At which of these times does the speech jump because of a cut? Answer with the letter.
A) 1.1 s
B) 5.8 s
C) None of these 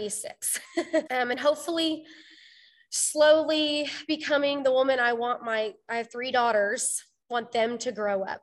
A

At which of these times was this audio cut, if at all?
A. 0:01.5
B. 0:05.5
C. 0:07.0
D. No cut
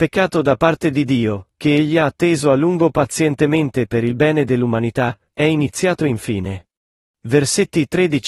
C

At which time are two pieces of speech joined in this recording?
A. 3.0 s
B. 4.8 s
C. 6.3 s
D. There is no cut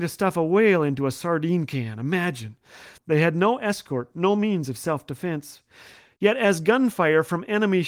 A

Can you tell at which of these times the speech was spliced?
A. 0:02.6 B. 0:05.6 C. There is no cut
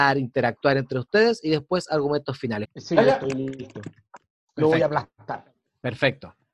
A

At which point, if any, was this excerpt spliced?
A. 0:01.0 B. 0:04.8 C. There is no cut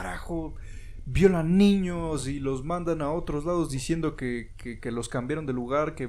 C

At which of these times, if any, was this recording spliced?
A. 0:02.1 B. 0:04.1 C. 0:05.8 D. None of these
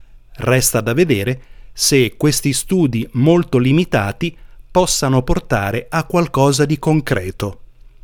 D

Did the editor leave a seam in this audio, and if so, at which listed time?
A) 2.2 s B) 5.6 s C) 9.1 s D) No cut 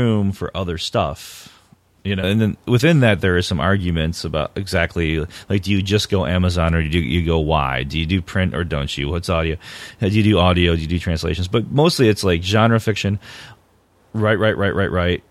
A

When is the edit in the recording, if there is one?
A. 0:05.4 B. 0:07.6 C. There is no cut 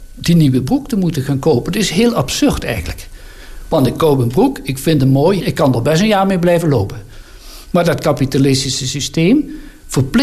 A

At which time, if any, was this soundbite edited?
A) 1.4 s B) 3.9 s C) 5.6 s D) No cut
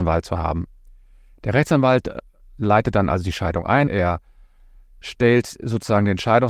B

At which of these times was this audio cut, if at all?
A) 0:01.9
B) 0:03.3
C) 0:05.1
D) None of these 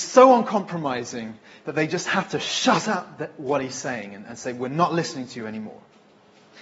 D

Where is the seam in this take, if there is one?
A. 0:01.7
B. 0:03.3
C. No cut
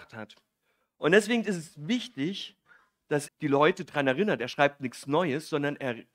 B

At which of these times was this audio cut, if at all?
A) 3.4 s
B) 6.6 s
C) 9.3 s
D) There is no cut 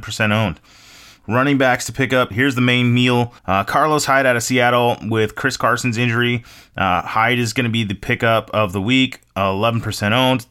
A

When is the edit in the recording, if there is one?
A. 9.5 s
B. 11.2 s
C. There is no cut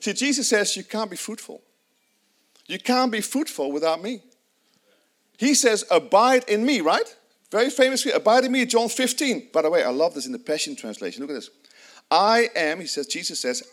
A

